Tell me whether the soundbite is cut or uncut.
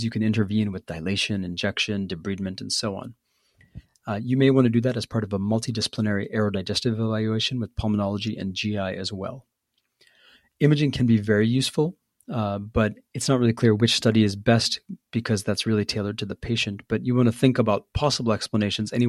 uncut